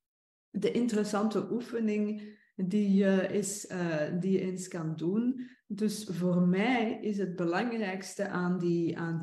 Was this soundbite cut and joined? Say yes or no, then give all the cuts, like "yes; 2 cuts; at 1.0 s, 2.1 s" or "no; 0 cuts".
no; 0 cuts